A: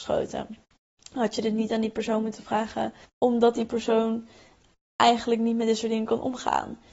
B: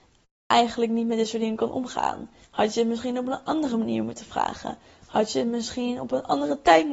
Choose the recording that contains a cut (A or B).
A